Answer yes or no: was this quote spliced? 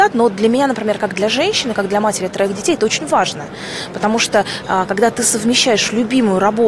no